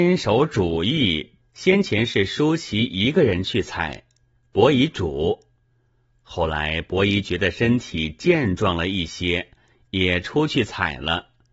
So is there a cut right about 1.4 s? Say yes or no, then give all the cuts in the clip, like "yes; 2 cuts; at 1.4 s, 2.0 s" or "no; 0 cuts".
yes; 1 cut; at 1.4 s